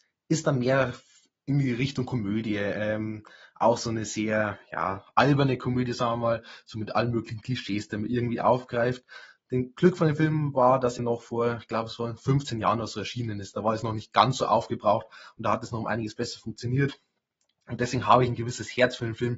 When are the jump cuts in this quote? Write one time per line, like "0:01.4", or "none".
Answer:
0:11.0